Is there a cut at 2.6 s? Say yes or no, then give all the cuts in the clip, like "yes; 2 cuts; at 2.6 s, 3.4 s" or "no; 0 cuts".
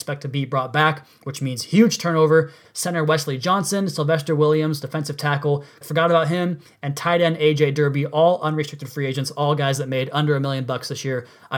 yes; 2 cuts; at 2.6 s, 5.8 s